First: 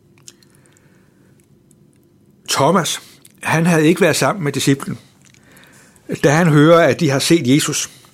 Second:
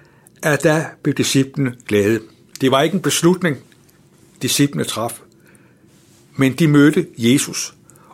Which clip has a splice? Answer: second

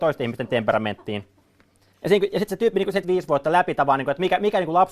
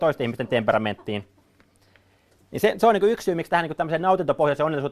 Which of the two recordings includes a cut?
first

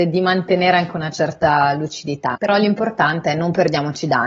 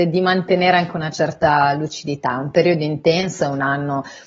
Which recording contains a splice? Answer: first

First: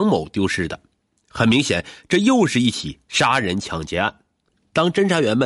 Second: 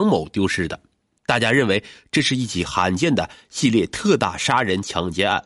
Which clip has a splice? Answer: second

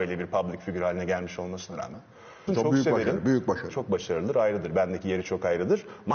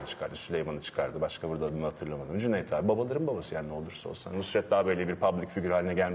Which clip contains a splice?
first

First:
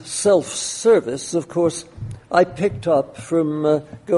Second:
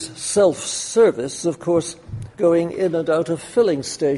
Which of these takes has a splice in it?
second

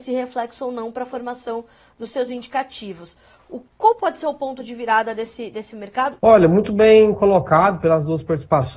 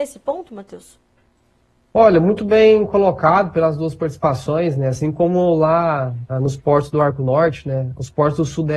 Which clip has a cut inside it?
first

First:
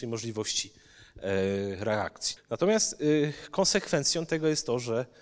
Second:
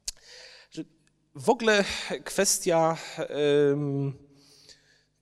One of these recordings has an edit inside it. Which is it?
first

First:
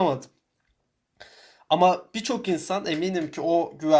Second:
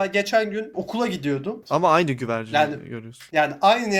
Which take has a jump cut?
second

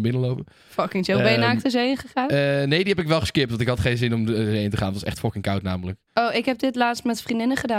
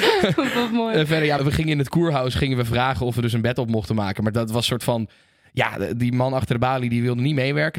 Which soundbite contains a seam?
second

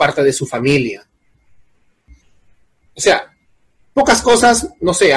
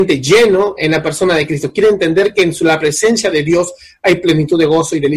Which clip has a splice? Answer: first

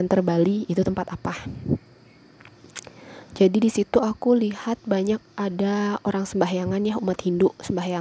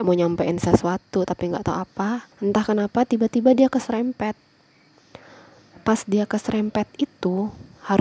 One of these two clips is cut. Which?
second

